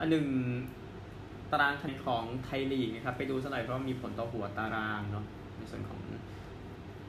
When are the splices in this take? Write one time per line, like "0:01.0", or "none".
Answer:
0:01.9